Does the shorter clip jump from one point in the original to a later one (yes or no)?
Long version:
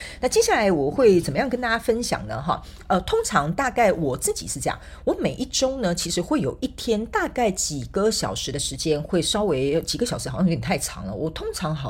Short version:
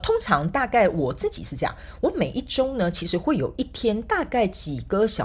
no